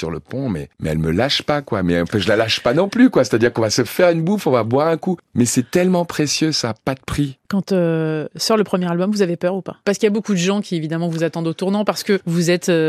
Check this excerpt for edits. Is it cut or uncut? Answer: uncut